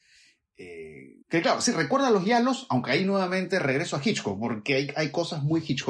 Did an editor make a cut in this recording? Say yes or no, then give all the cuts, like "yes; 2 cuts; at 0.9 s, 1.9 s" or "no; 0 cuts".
yes; 1 cut; at 1.2 s